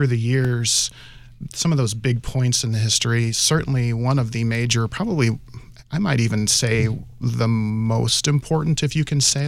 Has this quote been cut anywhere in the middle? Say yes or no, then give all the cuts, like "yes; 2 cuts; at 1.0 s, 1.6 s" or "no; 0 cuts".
no; 0 cuts